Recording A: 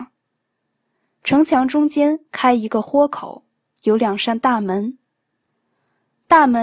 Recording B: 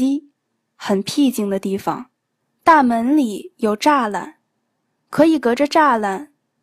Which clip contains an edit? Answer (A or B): B